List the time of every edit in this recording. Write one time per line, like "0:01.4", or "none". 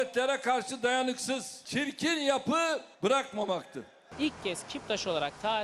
0:02.9

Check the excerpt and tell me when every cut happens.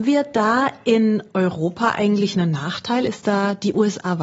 none

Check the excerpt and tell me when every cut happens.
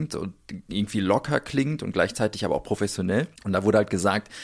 0:03.4

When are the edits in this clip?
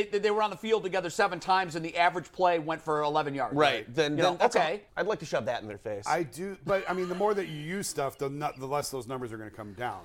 0:04.9

